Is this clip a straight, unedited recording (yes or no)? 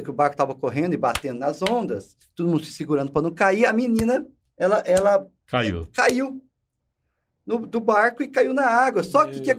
yes